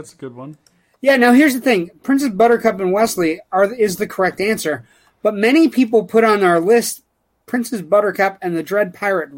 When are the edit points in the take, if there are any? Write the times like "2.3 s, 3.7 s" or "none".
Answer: none